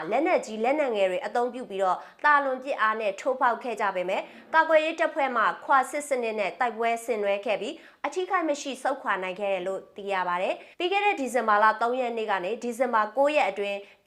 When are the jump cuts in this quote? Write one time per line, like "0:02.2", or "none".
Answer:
0:10.7